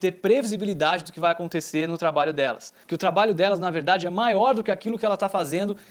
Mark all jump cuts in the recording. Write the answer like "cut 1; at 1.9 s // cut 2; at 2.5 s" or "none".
cut 1; at 2.8 s